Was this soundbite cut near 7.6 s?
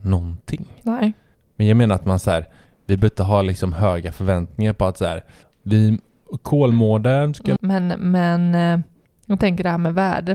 yes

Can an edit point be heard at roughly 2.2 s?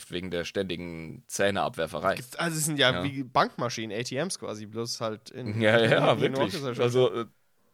yes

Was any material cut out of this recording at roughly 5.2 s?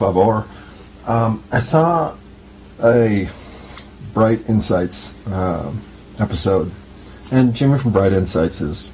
yes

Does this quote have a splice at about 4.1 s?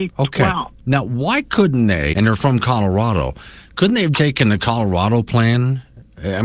yes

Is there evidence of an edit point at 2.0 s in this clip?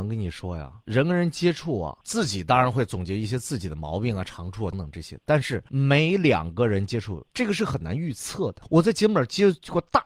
no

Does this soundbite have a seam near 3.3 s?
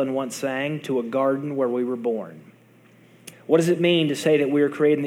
yes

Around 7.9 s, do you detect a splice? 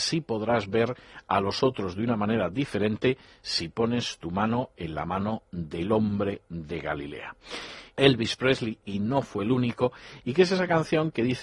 yes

